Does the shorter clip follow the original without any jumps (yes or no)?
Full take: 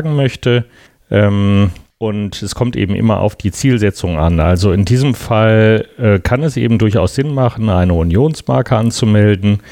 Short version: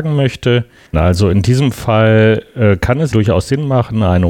no